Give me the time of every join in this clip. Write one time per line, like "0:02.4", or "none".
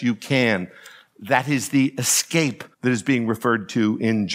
0:02.7